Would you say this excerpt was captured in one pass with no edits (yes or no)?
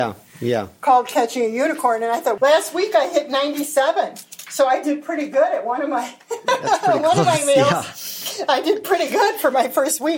no